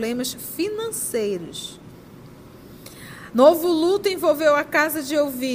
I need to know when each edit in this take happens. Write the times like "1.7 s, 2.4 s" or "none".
3.3 s